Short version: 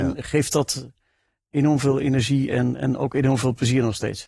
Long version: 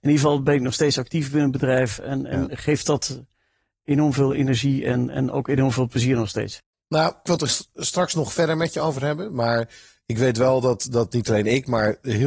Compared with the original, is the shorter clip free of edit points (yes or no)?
yes